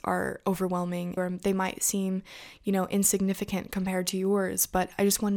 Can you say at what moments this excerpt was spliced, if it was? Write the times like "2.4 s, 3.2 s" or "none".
1.2 s